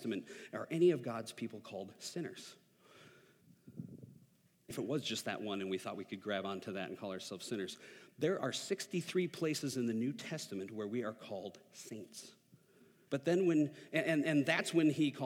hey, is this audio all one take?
no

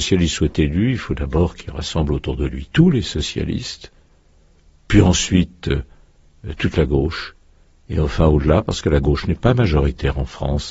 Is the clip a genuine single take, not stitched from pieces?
yes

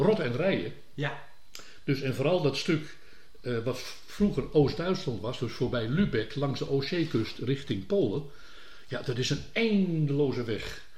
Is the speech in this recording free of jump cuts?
yes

